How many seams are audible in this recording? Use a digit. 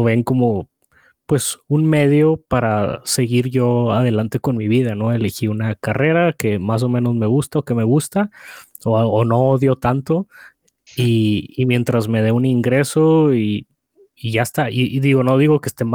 0